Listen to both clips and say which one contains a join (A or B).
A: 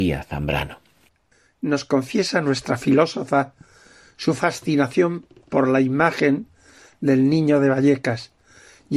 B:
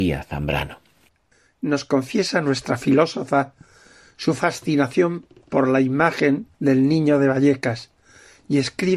B